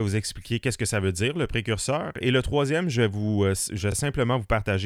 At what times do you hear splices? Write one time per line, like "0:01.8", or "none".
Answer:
none